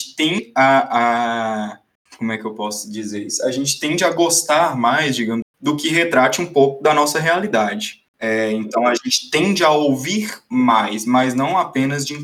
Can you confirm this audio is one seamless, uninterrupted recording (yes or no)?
no